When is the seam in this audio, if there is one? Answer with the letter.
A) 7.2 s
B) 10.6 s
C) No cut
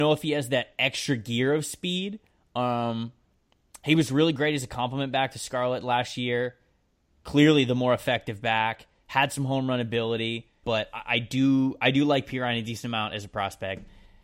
B